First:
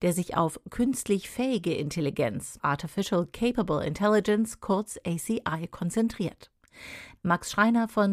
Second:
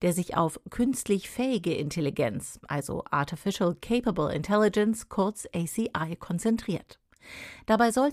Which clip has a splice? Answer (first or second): first